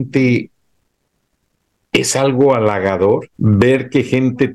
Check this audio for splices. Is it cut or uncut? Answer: cut